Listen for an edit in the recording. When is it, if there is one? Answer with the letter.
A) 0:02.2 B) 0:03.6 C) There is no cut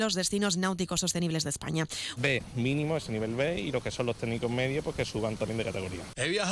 A